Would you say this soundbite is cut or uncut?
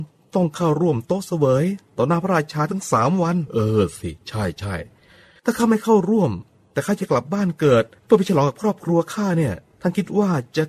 uncut